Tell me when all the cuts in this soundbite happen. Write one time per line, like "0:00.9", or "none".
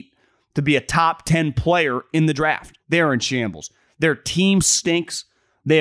0:02.8

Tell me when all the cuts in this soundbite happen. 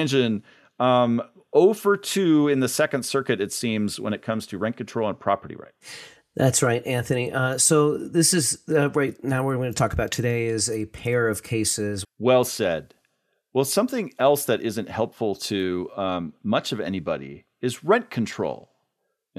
0:12.0

